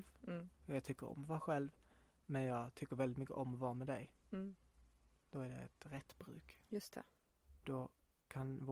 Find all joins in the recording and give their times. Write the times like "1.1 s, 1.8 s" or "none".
6.7 s